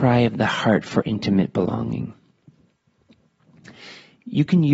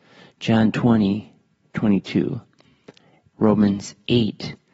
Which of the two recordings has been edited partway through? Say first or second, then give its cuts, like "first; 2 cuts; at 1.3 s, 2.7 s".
second; 1 cut; at 3.3 s